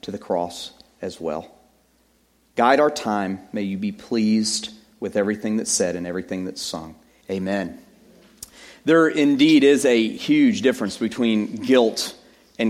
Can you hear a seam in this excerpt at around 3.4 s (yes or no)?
no